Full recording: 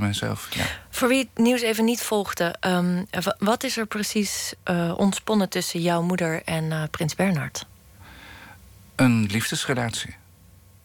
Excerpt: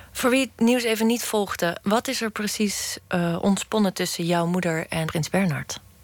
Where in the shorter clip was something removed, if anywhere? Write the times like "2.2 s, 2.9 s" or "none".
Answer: 1.8 s, 5.1 s